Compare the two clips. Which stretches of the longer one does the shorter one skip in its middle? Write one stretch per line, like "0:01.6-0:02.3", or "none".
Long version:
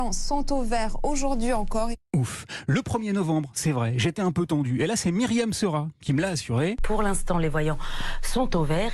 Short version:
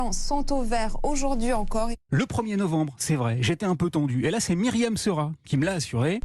0:02.1-0:02.7